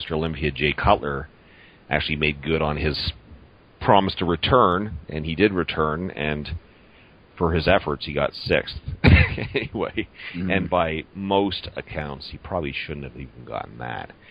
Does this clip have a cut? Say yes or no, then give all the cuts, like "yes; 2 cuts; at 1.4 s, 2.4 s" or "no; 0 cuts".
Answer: no; 0 cuts